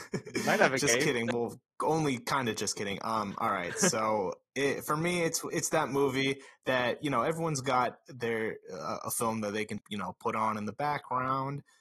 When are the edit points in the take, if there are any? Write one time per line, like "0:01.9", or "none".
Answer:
0:05.5
0:09.8